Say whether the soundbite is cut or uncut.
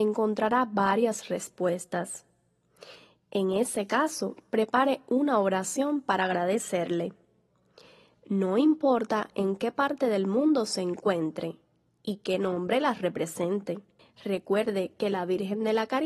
cut